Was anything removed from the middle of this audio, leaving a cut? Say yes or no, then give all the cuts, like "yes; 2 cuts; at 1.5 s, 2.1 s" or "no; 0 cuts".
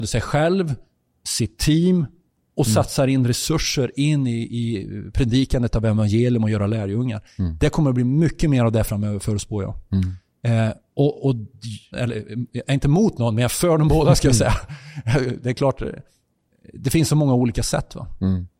yes; 1 cut; at 11.9 s